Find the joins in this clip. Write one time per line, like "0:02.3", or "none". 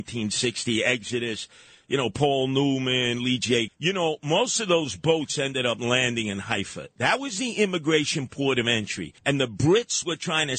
0:03.7
0:09.2